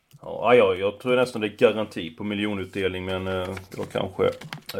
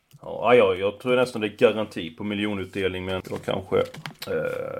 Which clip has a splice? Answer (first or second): second